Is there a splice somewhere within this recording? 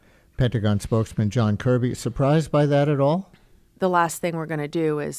yes; 1 cut; at 3.7 s

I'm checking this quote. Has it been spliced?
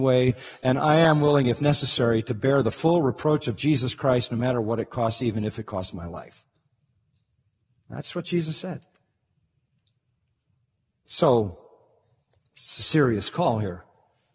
no; 0 cuts

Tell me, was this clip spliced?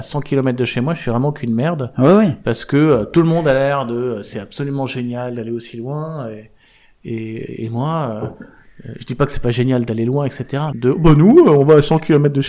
yes; 1 cut; at 10.7 s

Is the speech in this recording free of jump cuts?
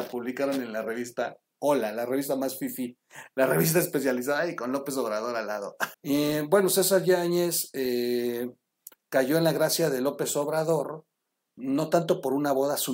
no; 1 cut; at 5.9 s

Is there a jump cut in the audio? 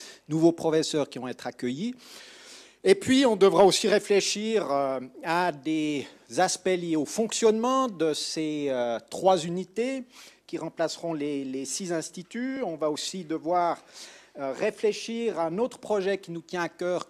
no; 0 cuts

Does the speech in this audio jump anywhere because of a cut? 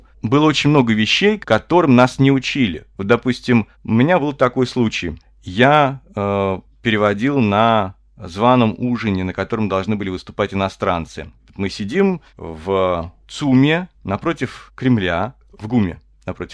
no; 0 cuts

